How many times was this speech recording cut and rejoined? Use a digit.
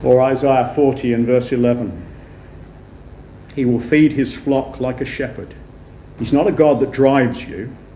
1